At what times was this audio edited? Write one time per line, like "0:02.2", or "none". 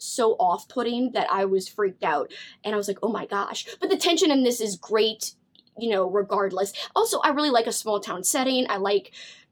none